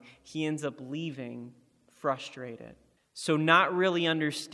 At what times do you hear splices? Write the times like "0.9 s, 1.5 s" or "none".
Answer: 3.0 s